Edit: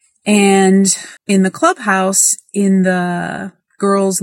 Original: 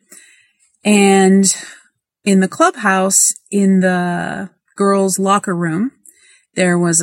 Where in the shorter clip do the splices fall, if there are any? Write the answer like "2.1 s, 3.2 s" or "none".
1.2 s